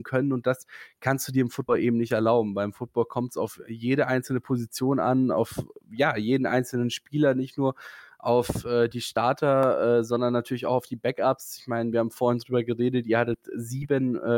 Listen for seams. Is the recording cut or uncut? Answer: uncut